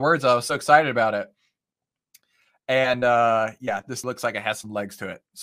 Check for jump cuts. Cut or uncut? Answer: cut